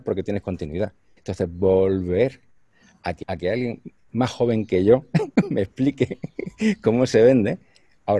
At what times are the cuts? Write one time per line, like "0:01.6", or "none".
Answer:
0:01.2
0:03.2